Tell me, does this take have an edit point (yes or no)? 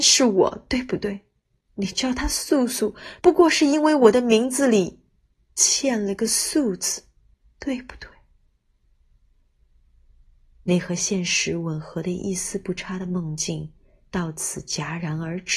yes